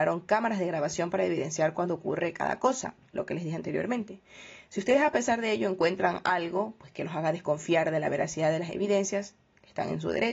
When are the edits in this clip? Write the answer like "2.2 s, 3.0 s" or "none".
none